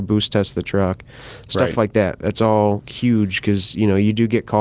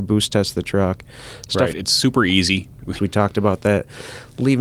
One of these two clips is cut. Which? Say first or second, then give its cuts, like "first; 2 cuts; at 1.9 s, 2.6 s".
second; 2 cuts; at 1.7 s, 3.0 s